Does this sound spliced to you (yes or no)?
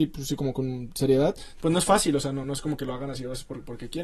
no